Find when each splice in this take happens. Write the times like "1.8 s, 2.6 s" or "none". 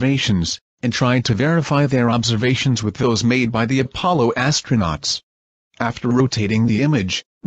5.6 s